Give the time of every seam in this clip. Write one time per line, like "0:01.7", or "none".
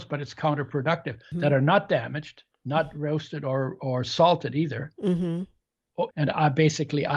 0:01.3
0:06.1